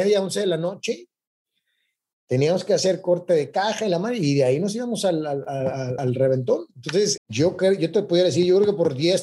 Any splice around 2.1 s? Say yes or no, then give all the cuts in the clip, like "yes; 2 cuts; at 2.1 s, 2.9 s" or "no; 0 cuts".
no; 2 cuts; at 6.0 s, 7.2 s